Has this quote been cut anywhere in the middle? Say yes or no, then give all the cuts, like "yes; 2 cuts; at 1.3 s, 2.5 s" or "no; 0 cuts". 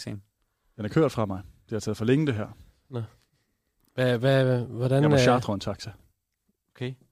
no; 0 cuts